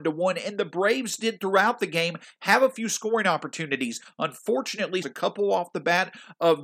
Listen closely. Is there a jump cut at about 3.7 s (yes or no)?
no